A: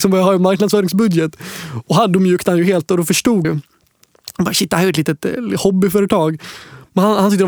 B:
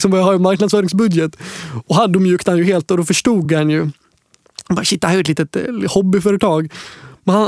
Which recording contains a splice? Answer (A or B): A